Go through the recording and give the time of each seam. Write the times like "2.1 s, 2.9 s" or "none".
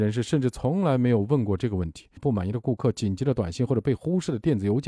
2.2 s